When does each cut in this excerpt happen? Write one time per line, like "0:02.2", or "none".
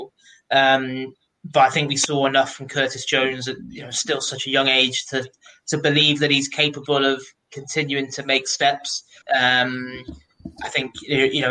0:09.2